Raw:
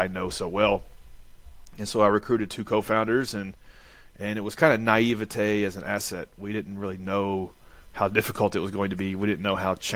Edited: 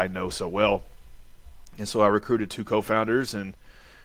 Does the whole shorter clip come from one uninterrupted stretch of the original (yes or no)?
yes